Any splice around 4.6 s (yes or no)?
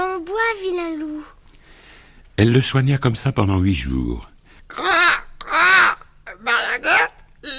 yes